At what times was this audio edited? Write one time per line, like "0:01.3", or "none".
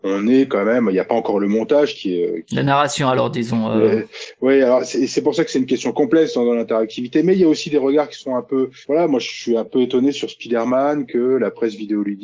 none